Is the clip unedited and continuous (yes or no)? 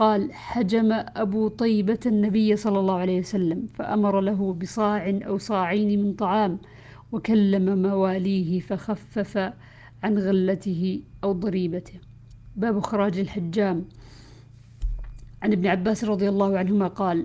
yes